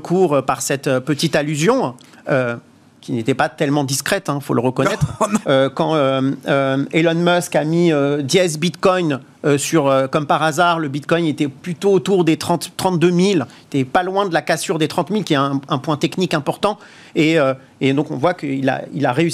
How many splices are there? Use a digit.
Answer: 1